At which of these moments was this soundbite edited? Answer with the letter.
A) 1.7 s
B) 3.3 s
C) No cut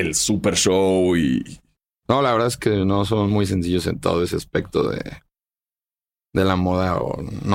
C